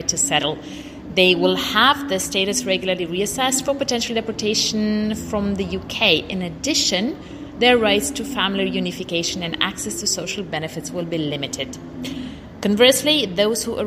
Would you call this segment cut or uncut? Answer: uncut